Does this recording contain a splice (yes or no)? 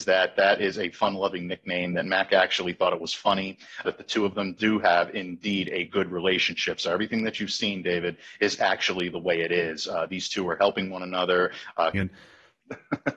yes